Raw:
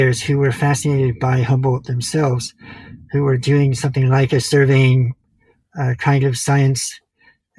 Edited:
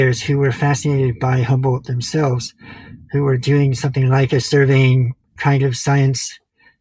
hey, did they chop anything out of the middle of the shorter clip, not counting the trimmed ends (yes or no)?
yes